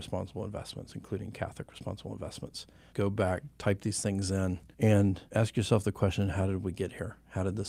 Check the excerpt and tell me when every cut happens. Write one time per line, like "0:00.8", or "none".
0:02.9
0:04.7